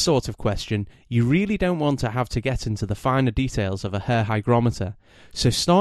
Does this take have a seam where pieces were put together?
no; 0 cuts

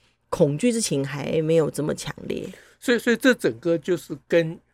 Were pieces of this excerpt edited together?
no; 0 cuts

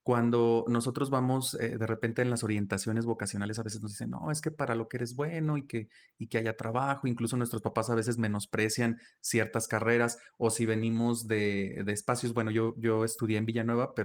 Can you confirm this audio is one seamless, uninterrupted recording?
yes; 0 cuts

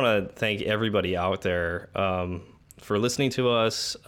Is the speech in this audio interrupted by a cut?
no; 0 cuts

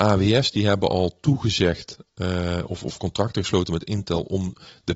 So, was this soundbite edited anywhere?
no; 0 cuts

